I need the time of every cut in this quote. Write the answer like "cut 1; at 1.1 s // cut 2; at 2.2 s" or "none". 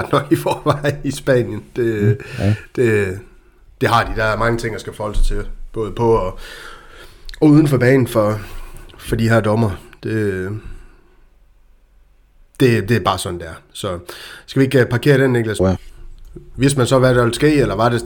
cut 1; at 15.6 s